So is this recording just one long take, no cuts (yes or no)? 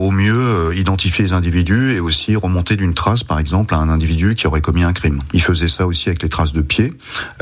no